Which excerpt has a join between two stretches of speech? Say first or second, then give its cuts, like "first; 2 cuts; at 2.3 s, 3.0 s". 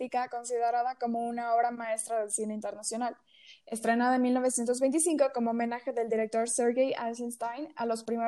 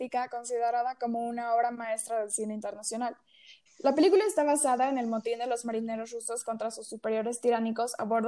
second; 1 cut; at 3.7 s